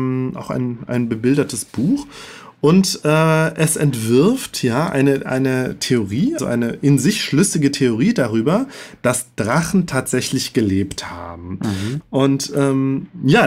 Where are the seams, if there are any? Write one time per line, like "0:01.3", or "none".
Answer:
0:06.4
0:12.0